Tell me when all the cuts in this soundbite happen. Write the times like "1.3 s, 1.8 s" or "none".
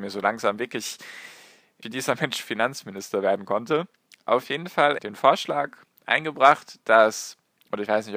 1.8 s, 5.0 s